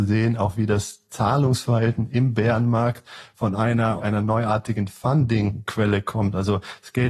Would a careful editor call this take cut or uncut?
cut